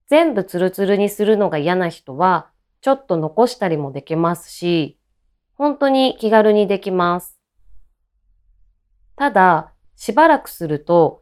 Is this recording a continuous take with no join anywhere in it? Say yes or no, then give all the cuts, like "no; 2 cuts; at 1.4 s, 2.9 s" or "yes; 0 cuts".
no; 1 cut; at 9.8 s